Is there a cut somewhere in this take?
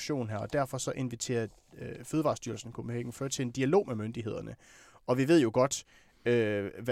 no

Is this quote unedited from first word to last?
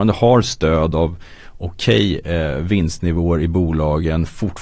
yes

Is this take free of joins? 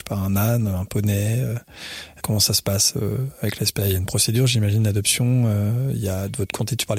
no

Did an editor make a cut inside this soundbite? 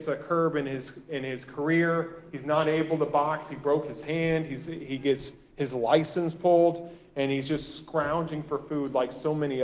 no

